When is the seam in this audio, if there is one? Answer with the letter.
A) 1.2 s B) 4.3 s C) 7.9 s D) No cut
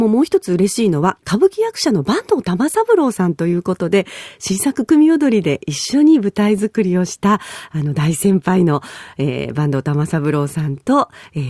A